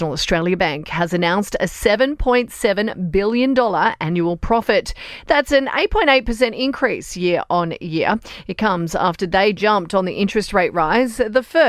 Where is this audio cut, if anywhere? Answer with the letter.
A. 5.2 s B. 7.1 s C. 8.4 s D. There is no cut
D